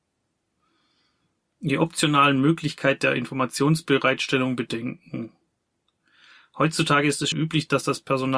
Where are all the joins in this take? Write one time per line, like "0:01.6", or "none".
0:07.3